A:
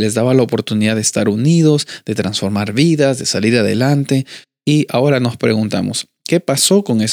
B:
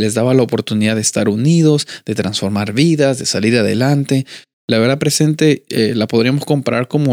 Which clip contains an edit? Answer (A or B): B